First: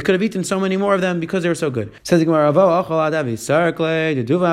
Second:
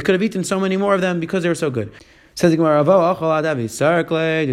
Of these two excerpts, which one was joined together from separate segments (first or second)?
first